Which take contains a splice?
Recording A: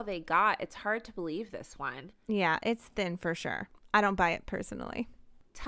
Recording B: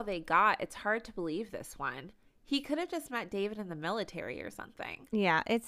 A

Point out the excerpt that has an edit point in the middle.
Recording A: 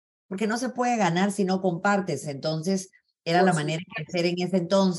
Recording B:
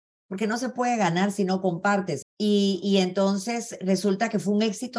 B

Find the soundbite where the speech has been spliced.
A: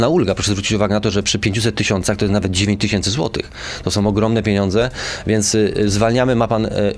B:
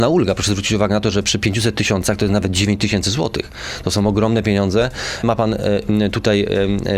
B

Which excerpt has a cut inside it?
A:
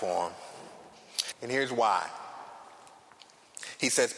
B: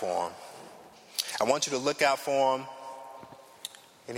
A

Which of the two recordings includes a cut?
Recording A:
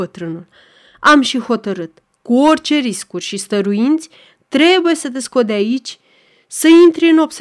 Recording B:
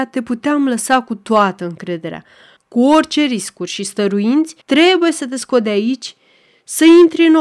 B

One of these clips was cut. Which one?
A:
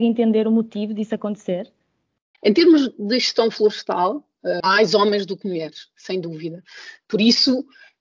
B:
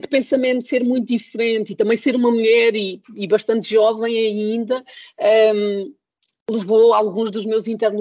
A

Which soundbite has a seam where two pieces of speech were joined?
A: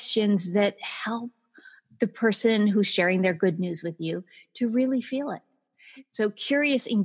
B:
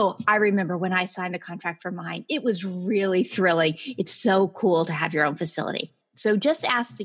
B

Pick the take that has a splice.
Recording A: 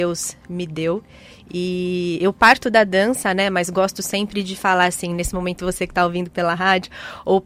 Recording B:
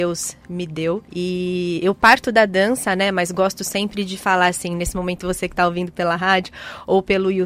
B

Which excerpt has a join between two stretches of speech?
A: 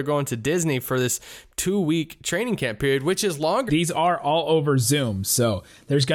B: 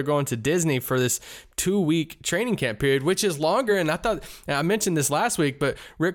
A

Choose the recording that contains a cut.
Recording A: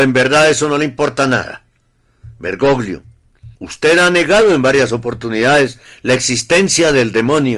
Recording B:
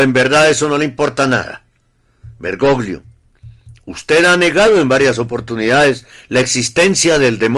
A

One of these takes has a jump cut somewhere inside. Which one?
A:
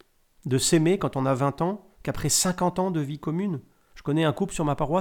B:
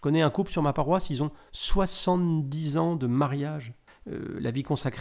B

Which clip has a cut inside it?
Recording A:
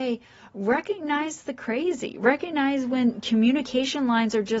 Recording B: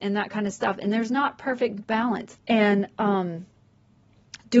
B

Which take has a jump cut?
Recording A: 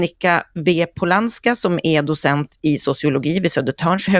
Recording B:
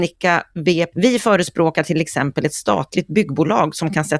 B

